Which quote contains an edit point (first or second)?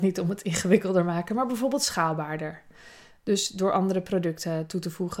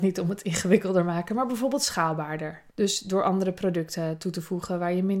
second